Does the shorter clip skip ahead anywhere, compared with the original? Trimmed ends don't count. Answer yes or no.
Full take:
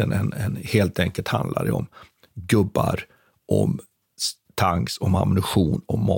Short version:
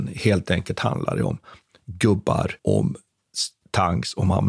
yes